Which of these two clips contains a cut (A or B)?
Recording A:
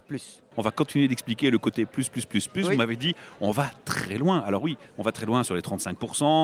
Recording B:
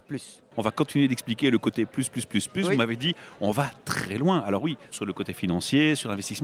B